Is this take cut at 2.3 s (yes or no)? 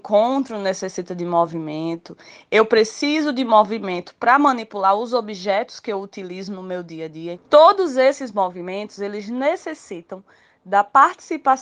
no